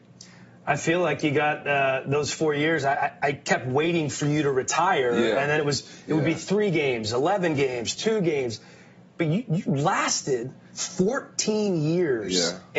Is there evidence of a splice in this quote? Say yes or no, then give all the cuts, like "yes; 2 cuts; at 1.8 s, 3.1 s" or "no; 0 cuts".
yes; 1 cut; at 8.0 s